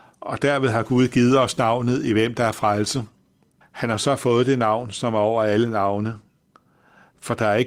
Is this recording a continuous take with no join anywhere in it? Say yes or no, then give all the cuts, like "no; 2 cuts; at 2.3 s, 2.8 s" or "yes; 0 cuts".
no; 1 cut; at 3.6 s